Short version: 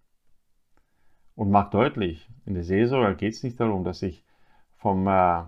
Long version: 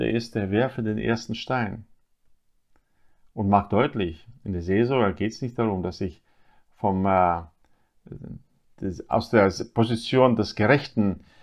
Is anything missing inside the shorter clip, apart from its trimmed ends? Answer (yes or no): no